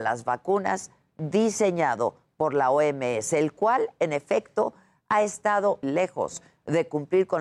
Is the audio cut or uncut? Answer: cut